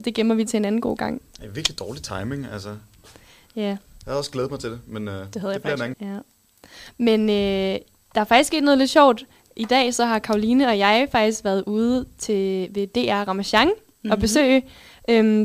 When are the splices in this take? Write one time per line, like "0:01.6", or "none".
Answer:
0:05.9